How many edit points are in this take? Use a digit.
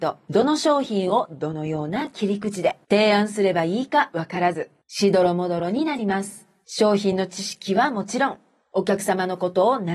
0